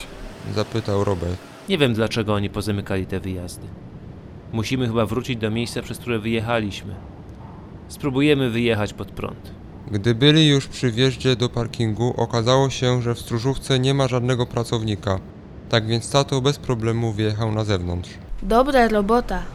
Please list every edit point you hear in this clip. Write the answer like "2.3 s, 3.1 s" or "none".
1.7 s